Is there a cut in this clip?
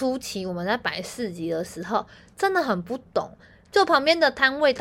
yes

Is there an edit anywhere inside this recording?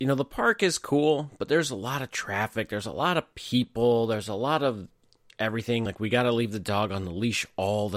no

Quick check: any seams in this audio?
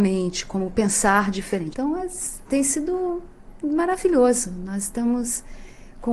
yes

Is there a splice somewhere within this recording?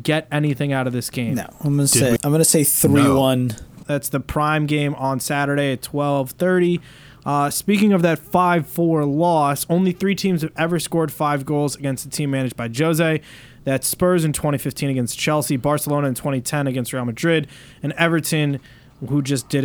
yes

